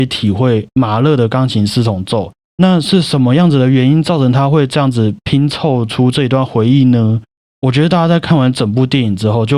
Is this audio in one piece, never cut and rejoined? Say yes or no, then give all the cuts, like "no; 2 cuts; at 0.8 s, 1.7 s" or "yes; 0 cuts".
no; 2 cuts; at 2.4 s, 7.4 s